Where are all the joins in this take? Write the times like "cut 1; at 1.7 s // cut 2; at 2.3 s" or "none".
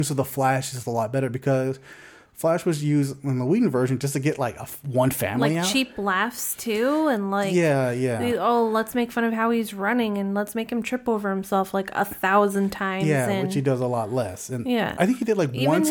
none